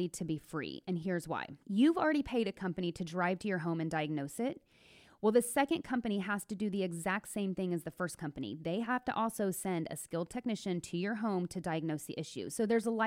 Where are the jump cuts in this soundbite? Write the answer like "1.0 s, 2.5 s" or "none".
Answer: 1.6 s